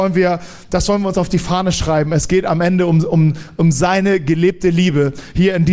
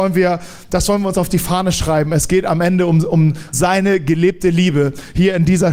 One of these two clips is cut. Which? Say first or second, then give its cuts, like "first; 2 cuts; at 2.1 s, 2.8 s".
second; 1 cut; at 3.5 s